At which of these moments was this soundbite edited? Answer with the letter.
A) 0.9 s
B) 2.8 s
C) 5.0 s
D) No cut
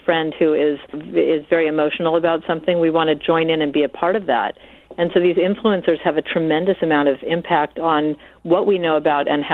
A